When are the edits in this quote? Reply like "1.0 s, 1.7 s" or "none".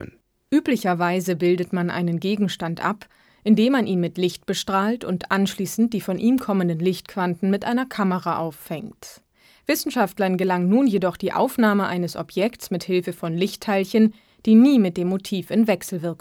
none